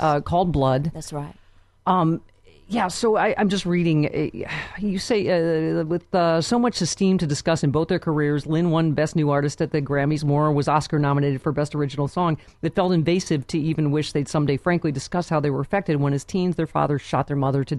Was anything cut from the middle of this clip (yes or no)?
no